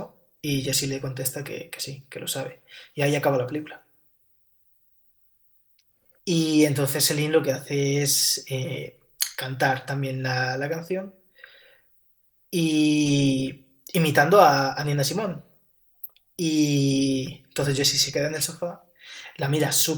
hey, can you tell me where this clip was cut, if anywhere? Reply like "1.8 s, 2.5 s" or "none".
6.2 s